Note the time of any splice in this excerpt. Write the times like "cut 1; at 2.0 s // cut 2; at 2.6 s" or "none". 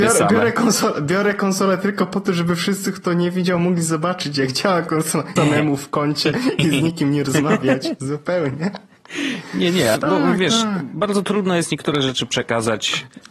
cut 1; at 5.4 s // cut 2; at 9.9 s